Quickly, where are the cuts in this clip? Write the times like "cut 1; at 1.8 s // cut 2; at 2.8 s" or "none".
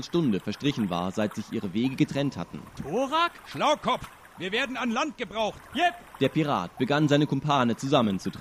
cut 1; at 2.7 s // cut 2; at 5.7 s